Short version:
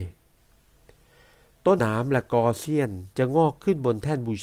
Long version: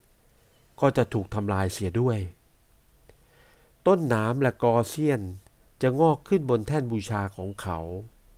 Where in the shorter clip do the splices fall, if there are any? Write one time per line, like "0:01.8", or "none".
0:01.8
0:03.1

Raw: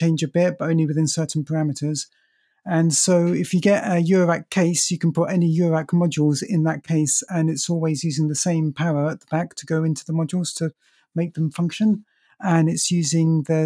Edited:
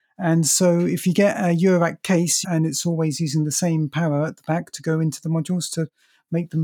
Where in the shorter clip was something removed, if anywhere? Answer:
0:02.4

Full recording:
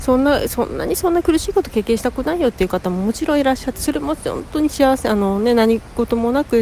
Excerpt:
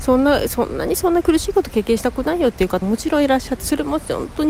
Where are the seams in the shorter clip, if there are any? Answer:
0:02.8

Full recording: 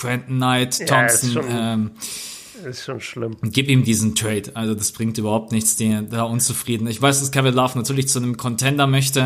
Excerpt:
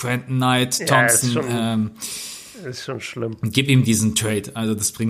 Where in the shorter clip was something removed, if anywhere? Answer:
none

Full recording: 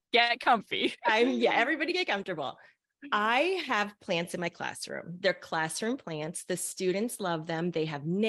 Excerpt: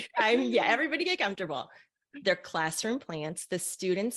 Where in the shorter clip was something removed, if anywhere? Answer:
0:02.2

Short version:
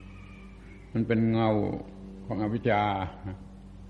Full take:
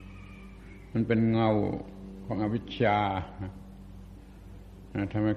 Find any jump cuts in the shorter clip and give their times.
0:02.6

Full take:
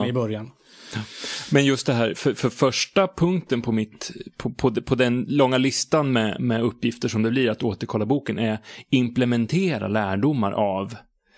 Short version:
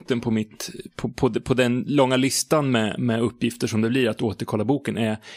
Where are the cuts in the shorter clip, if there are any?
none

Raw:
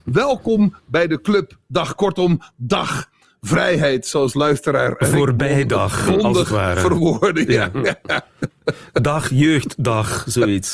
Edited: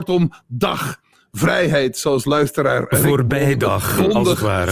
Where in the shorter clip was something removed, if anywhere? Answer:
none

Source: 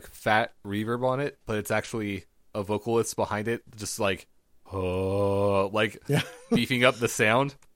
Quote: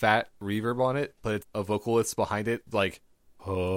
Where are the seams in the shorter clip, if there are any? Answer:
0:01.4
0:02.7

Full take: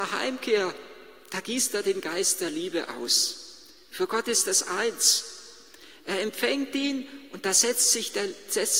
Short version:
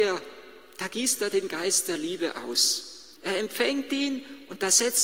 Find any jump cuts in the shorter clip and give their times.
0:03.2

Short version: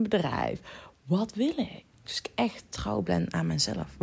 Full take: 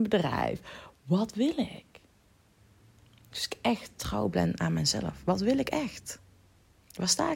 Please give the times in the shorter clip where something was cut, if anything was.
0:01.9

